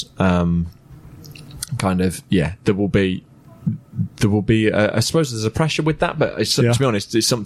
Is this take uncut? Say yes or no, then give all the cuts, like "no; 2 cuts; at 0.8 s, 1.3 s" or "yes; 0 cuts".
yes; 0 cuts